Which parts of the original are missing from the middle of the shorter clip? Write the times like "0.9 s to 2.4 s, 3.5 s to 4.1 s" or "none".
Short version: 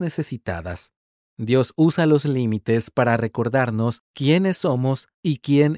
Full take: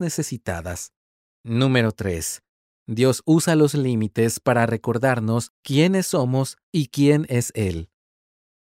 1.2 s to 2.7 s